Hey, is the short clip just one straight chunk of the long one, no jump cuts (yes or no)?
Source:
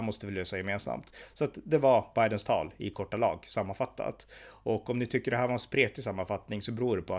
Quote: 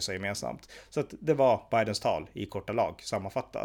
yes